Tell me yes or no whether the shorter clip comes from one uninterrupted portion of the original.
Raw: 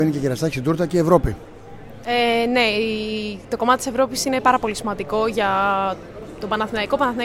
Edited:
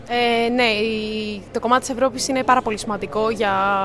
yes